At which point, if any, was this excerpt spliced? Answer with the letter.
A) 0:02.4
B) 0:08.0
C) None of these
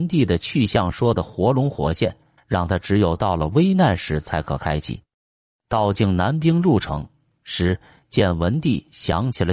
A